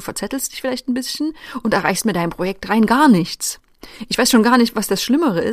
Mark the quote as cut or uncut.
uncut